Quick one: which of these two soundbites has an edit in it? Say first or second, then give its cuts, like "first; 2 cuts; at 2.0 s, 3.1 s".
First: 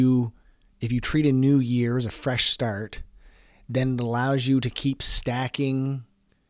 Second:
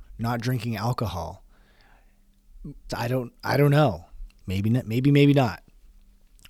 second; 2 cuts; at 2.9 s, 4.4 s